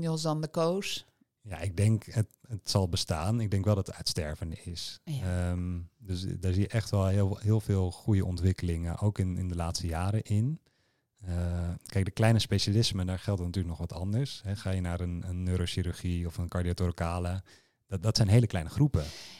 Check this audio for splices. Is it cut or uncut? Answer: uncut